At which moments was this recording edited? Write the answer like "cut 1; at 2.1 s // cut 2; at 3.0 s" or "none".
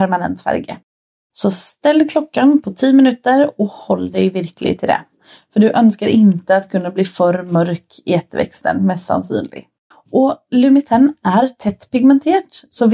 cut 1; at 1.3 s // cut 2; at 9.9 s